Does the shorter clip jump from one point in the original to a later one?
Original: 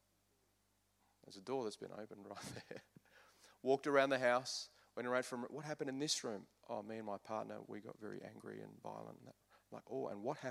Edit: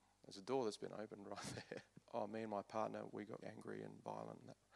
yes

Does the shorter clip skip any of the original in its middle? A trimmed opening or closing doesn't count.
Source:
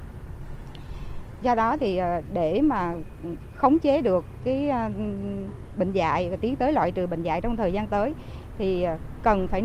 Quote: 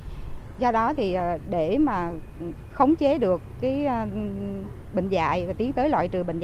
no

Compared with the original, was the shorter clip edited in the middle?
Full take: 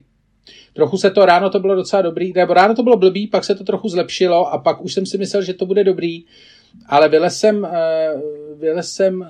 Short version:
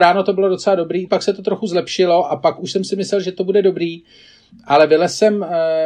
yes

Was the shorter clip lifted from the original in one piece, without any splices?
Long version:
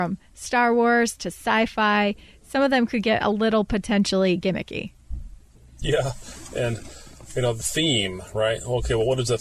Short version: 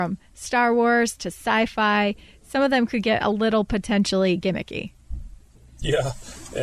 yes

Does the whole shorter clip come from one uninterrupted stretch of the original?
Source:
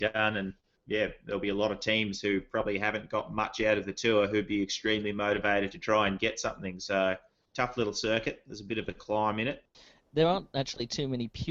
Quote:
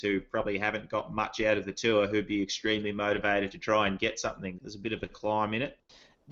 no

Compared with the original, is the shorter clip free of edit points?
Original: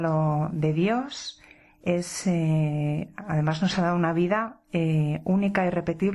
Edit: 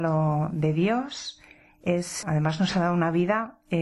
no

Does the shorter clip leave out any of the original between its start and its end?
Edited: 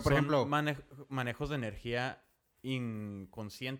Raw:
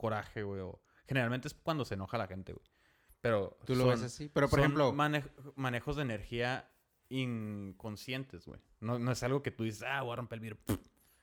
no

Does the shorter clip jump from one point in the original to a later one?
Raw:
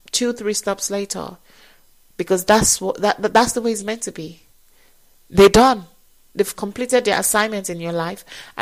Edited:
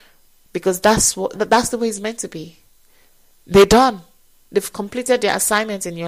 yes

